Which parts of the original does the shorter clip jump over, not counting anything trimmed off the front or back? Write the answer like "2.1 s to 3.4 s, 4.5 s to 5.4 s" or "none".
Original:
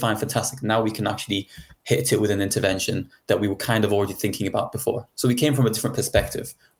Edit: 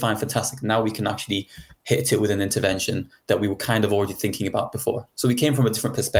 none